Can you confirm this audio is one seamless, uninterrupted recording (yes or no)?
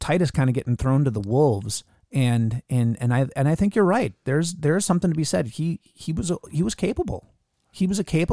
yes